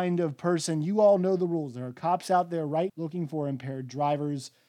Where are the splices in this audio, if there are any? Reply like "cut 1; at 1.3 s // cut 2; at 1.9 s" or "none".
cut 1; at 2.9 s